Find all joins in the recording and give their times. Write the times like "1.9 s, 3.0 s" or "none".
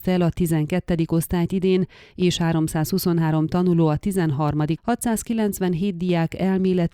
4.8 s